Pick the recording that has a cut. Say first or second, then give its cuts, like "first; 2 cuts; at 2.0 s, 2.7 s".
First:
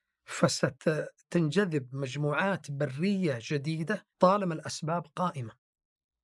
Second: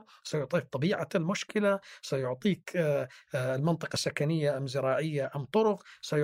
first; 2 cuts; at 1.2 s, 4.1 s